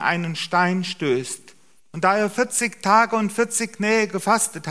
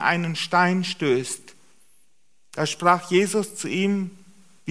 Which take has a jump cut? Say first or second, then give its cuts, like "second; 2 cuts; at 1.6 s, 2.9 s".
first; 1 cut; at 1.8 s